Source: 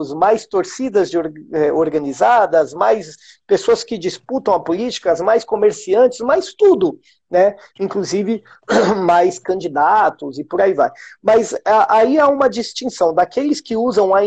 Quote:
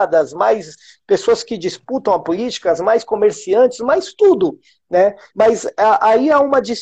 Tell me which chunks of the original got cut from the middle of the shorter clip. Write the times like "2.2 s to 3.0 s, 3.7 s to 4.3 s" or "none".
7.7 s to 11.2 s